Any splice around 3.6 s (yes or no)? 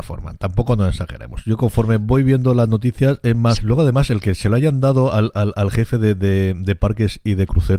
yes